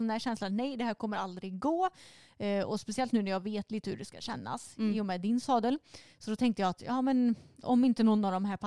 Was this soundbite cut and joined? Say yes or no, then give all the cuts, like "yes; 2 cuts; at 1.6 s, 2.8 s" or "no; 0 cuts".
no; 0 cuts